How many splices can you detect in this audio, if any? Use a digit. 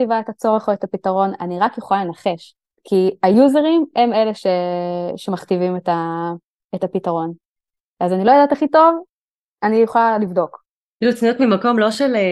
0